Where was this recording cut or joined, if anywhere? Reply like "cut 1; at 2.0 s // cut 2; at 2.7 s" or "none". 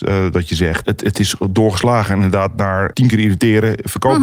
cut 1; at 2.9 s